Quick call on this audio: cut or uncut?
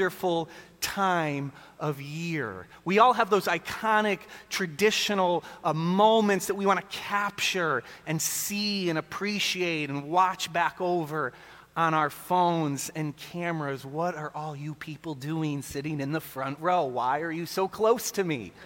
uncut